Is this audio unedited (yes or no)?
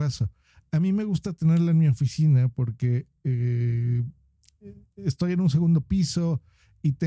yes